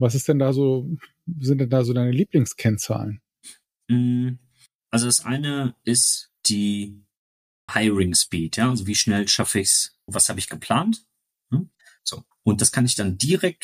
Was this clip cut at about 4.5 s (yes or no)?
no